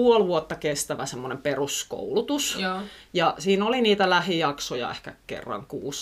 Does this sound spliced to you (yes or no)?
no